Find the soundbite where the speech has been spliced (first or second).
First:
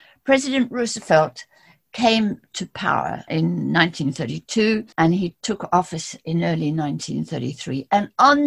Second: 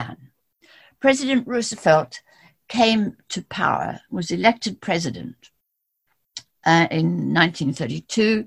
first